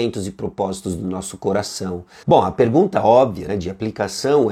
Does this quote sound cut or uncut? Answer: cut